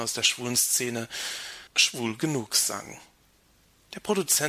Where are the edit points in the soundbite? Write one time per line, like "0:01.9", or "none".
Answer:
0:01.7